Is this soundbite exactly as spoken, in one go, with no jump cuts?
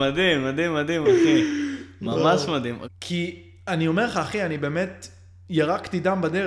no; 2 cuts; at 1.0 s, 2.8 s

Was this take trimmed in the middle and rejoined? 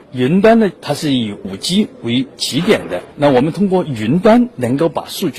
yes; 1 cut; at 3.1 s

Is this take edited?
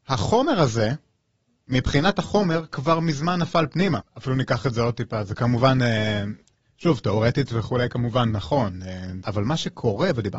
yes; 2 cuts; at 4.0 s, 9.2 s

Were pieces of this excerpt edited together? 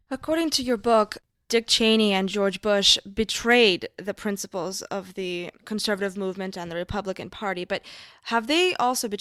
no; 0 cuts

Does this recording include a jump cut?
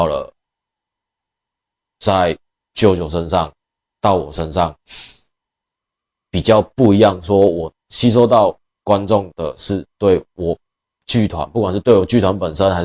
no; 0 cuts

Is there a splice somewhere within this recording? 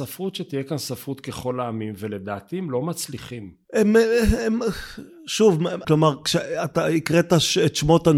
yes; 2 cuts; at 3.6 s, 5.8 s

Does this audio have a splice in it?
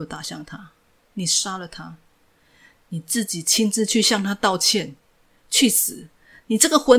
yes; 1 cut; at 1.0 s

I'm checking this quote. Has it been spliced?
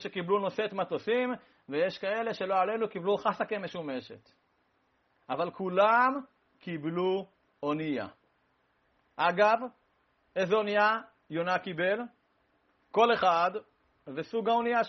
yes; 1 cut; at 12.8 s

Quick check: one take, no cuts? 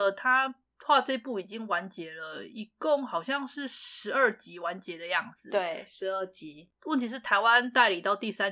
yes; 0 cuts

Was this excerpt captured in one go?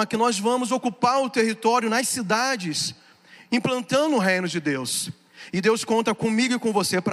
yes; 0 cuts

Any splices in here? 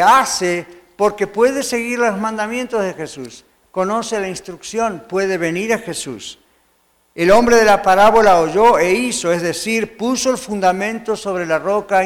no; 0 cuts

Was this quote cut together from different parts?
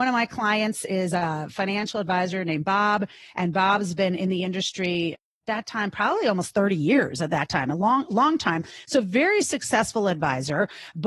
no; 0 cuts

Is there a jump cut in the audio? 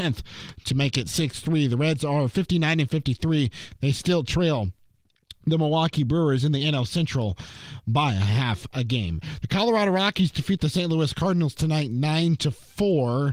no; 0 cuts

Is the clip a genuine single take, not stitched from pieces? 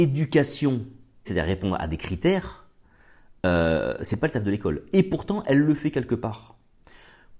no; 1 cut; at 1.2 s

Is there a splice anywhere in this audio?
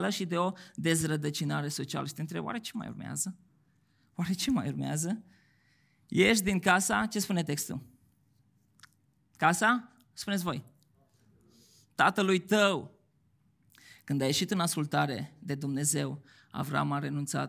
no; 0 cuts

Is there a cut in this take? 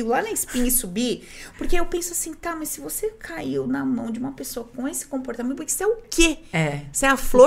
no; 0 cuts

